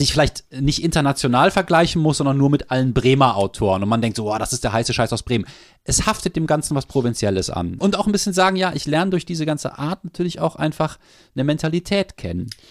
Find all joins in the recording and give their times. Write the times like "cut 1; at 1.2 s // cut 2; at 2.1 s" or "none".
cut 1; at 7.8 s